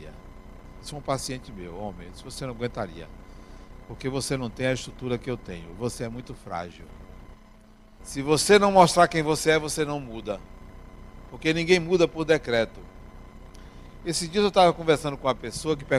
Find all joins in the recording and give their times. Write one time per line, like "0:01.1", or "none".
0:08.0